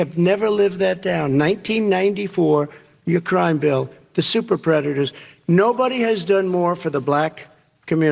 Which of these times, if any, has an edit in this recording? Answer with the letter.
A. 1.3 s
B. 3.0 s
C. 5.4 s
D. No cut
D